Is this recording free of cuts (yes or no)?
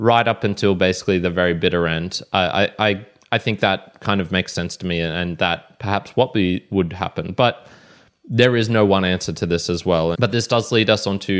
no